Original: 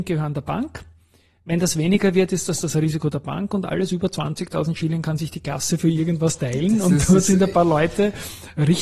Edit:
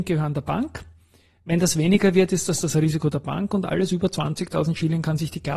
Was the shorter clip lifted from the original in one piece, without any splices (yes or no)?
yes